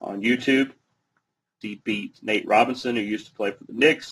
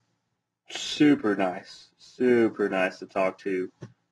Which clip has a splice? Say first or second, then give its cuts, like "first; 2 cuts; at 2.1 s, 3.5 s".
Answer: first; 1 cut; at 1.6 s